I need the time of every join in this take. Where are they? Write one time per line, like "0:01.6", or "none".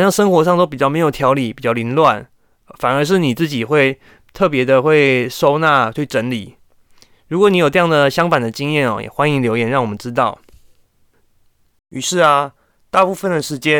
0:11.8

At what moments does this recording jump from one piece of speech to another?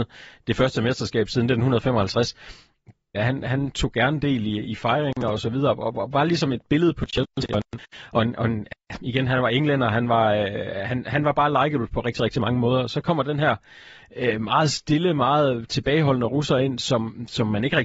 0:03.1

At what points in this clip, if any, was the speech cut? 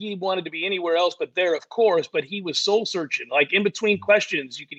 none

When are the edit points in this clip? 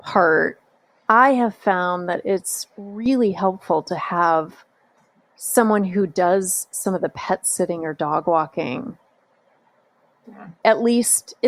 0:10.2

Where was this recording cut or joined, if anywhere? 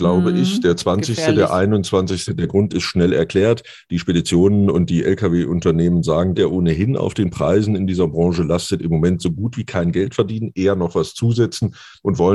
0:02.3
0:06.3

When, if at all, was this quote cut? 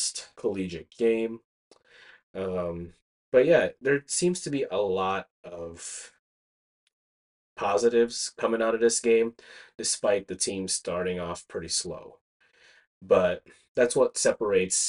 none

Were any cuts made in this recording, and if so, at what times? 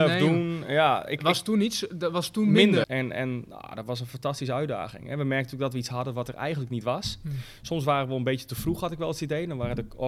0:02.8

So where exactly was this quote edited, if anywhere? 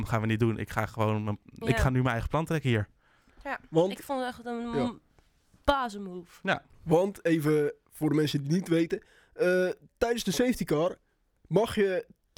none

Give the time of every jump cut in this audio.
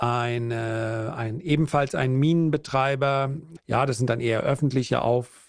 0:03.6

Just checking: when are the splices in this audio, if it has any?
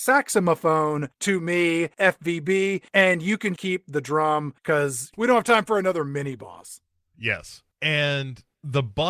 0:03.6

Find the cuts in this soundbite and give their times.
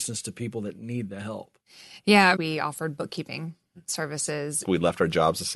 0:02.4
0:04.6

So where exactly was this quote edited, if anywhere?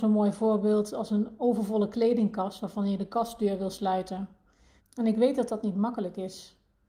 0:04.8

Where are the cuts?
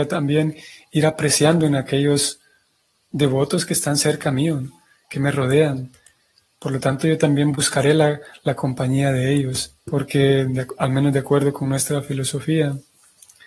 0:09.8

